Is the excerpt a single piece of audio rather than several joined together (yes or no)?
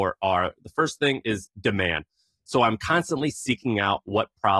yes